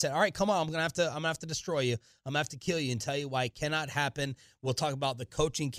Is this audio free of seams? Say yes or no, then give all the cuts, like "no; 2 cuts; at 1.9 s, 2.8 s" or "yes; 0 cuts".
yes; 0 cuts